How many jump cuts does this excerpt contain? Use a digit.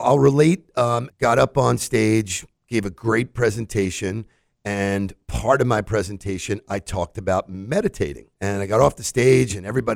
2